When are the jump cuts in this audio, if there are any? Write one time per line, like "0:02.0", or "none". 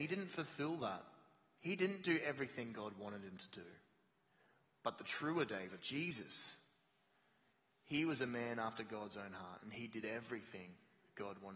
0:05.8